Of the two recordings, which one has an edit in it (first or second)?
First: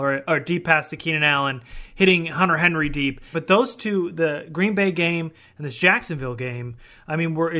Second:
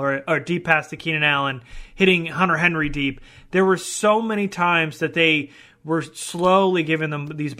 first